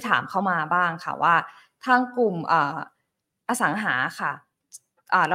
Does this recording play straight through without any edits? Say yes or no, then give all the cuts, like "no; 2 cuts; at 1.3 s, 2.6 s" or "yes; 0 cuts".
yes; 0 cuts